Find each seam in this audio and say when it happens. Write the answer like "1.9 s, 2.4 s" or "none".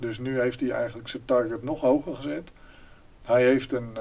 none